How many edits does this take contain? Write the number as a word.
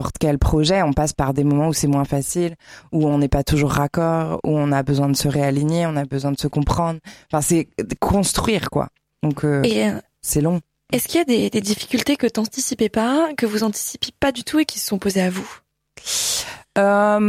zero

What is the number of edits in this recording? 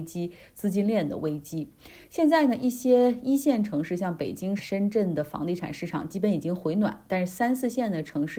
one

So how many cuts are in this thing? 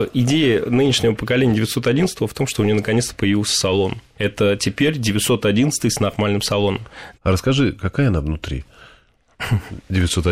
one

